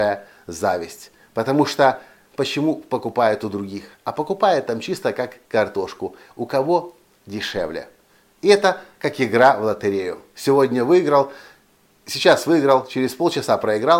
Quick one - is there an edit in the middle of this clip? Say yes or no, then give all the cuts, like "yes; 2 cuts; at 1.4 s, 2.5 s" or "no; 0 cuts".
yes; 1 cut; at 2.3 s